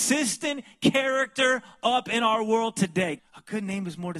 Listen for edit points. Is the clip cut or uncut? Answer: cut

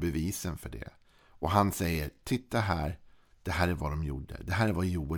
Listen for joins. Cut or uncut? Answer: uncut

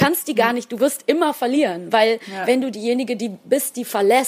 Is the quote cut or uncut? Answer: uncut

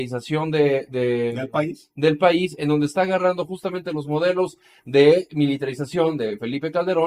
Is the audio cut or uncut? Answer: uncut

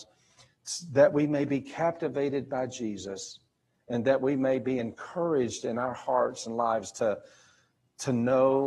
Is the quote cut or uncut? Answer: uncut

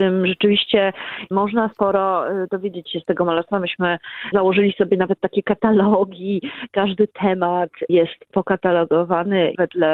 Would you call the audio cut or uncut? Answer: cut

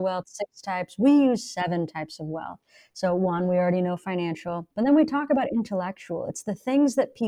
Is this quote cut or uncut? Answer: cut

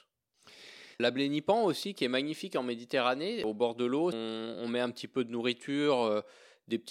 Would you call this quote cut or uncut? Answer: cut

